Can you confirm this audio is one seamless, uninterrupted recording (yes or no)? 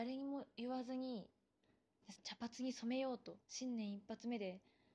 no